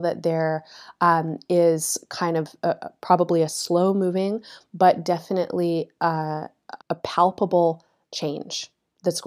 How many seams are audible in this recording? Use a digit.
1